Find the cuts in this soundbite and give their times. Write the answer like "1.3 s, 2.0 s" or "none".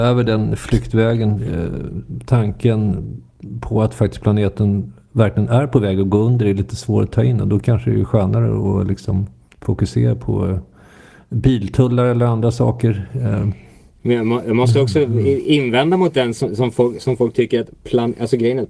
none